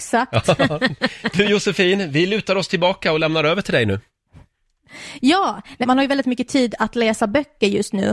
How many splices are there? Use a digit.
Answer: 1